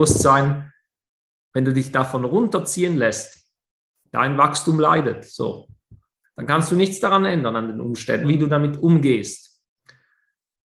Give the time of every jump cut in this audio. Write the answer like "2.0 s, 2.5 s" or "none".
6.2 s, 8.2 s